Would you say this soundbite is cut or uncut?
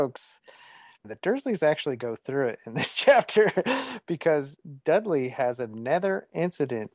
uncut